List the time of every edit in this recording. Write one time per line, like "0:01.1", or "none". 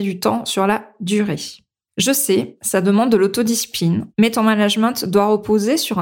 0:01.9
0:04.1